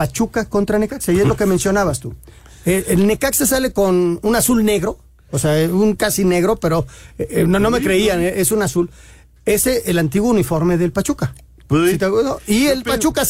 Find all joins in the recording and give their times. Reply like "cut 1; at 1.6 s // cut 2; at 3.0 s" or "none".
none